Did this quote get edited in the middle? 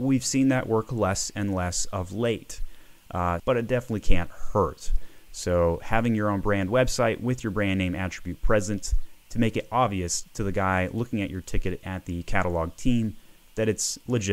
yes; 1 cut; at 3.4 s

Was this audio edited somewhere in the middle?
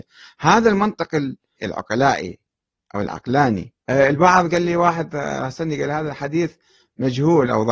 yes; 2 cuts; at 1.6 s, 3.8 s

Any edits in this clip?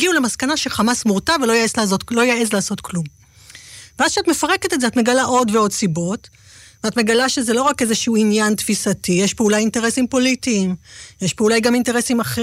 no; 0 cuts

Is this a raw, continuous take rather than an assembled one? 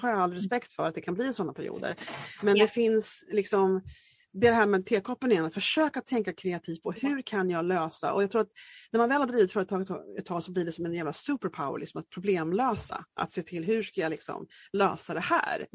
yes; 0 cuts

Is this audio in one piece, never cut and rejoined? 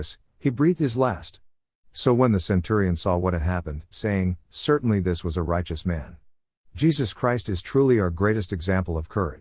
no; 2 cuts; at 3.9 s, 6.7 s

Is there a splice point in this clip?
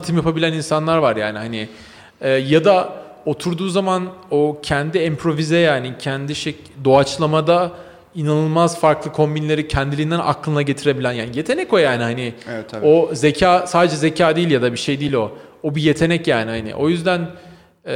no; 0 cuts

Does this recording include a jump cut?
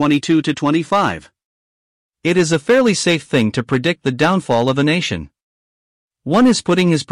yes; 1 cut; at 6.1 s

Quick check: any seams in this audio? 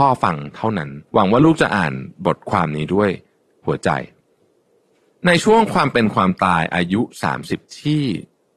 yes; 1 cut; at 1.1 s

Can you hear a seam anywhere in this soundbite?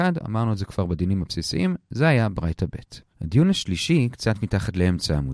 yes; 1 cut; at 3.1 s

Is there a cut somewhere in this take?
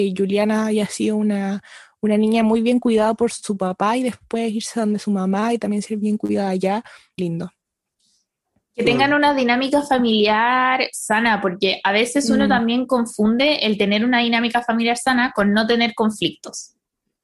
yes; 1 cut; at 7.2 s

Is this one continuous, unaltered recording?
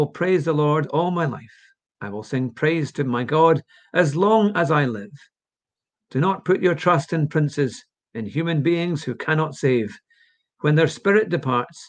yes; 0 cuts

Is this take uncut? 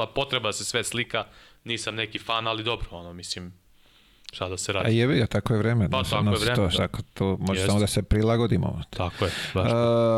yes; 0 cuts

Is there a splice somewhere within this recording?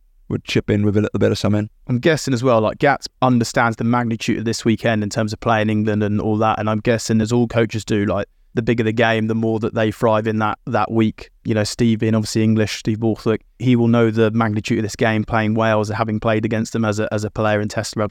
no; 0 cuts

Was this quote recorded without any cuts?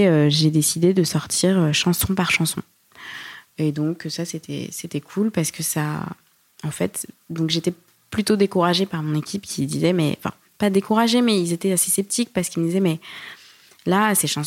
yes; 0 cuts

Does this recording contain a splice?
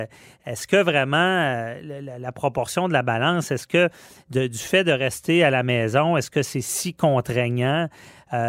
no; 0 cuts

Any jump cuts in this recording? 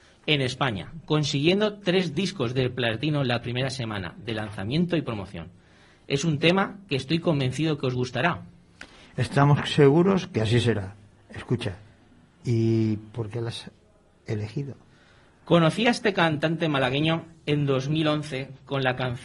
no; 0 cuts

